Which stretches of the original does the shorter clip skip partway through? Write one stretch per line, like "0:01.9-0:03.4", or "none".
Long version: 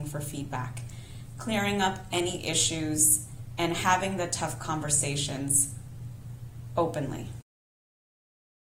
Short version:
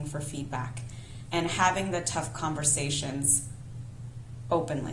0:01.3-0:03.6